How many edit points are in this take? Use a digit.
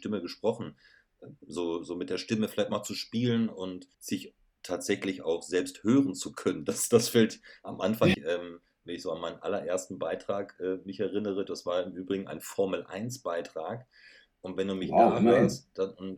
3